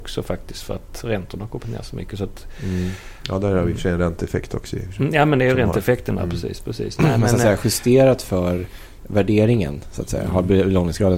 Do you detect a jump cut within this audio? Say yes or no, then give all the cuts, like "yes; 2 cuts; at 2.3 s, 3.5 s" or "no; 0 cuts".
no; 0 cuts